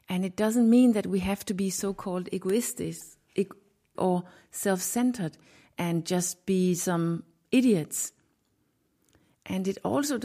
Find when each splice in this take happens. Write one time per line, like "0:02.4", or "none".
0:04.0